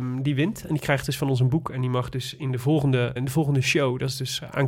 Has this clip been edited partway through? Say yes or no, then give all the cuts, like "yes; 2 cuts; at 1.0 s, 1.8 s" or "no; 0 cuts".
yes; 1 cut; at 3.2 s